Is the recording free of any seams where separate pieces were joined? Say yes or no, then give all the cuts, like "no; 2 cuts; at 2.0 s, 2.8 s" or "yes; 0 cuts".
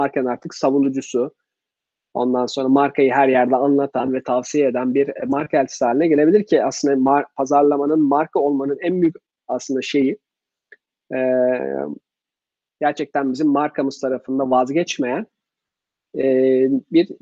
no; 1 cut; at 12.7 s